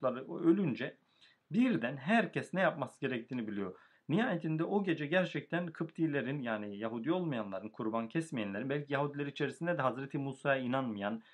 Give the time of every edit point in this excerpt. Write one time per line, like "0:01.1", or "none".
0:04.0